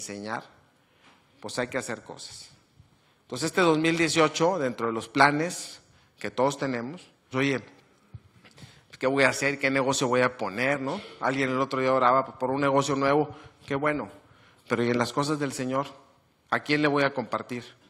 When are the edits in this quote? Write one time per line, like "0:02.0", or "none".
0:07.3

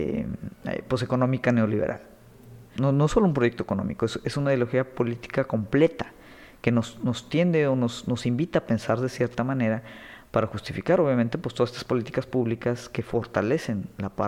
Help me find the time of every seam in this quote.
0:02.8

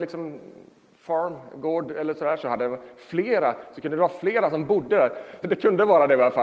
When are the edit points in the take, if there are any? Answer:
0:05.4

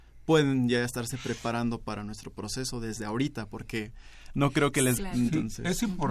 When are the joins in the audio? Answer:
0:05.0

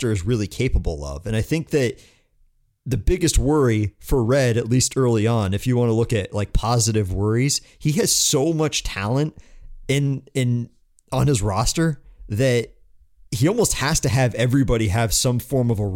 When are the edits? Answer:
none

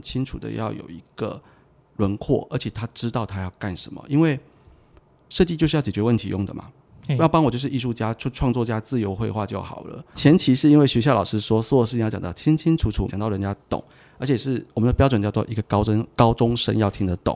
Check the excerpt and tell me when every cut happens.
0:10.1
0:13.1

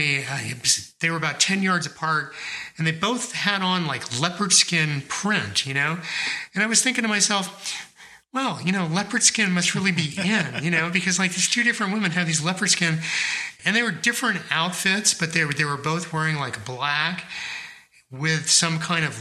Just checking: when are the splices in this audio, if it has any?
0:13.6

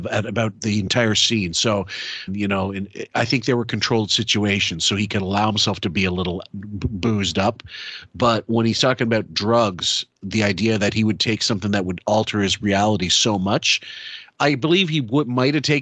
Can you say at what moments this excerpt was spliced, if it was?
0:02.3

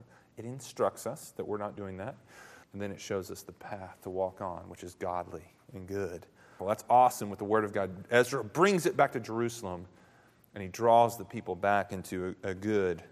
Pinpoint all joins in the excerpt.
0:02.6
0:06.6

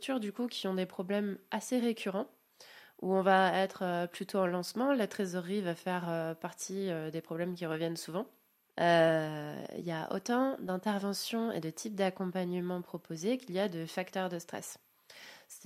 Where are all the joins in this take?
0:08.6

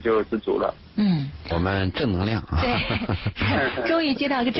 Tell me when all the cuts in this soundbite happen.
0:01.5

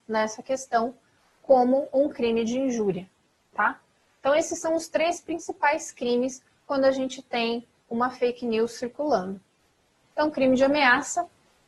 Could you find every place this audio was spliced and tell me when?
0:10.1

